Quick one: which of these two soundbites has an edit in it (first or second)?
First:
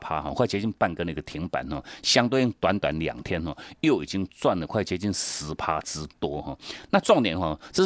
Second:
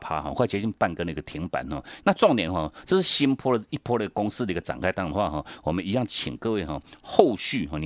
second